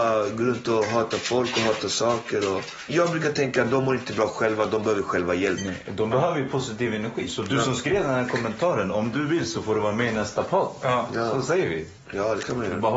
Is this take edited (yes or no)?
no